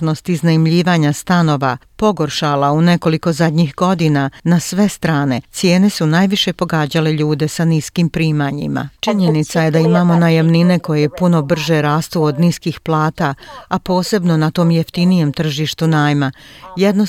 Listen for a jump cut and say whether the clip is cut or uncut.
cut